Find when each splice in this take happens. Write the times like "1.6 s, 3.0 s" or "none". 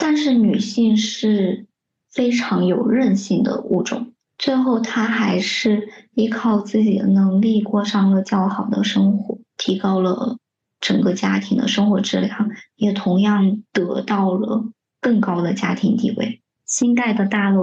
9.5 s, 16.6 s